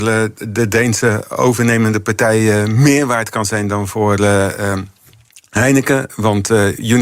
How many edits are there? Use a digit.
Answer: 0